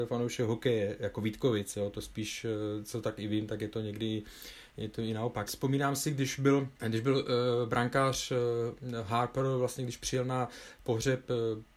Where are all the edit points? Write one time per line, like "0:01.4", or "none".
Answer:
0:05.5